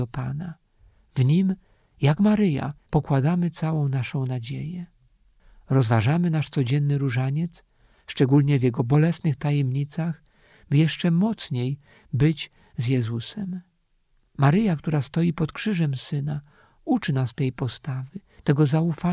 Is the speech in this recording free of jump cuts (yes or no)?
yes